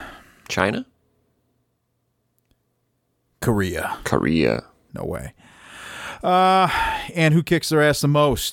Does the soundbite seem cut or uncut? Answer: cut